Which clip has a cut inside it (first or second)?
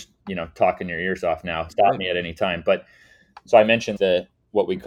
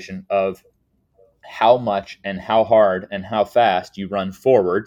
first